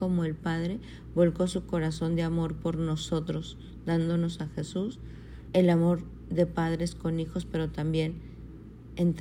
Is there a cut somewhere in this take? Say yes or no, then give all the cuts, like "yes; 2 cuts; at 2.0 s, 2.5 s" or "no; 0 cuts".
yes; 1 cut; at 5.5 s